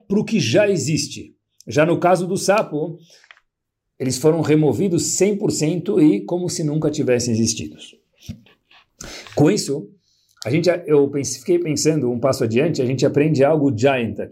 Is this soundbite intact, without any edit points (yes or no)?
yes